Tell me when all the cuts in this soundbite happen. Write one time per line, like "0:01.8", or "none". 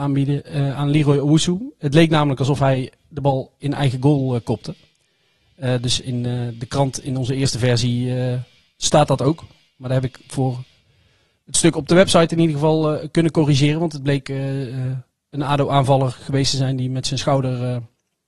none